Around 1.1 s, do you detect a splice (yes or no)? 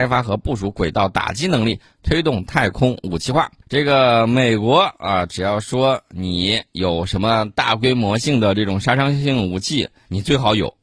no